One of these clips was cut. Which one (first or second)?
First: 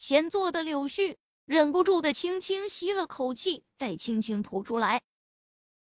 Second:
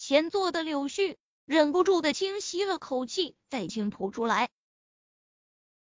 second